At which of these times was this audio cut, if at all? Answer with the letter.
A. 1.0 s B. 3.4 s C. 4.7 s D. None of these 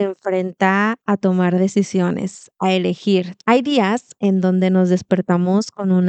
B